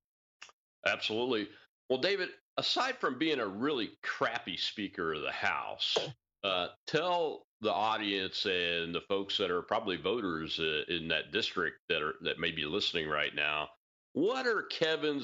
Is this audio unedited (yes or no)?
yes